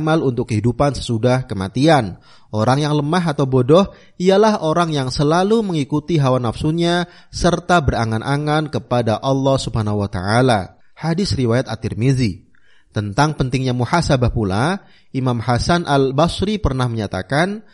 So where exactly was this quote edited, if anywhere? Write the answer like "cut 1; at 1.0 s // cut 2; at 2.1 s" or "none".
none